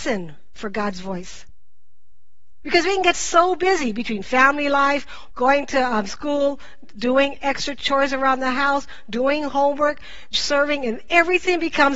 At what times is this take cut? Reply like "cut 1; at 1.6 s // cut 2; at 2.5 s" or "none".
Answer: cut 1; at 5.3 s // cut 2; at 10.3 s